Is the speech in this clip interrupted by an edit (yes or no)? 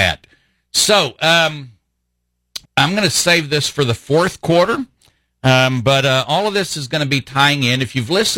yes